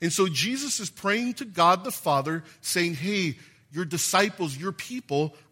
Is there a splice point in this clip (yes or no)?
no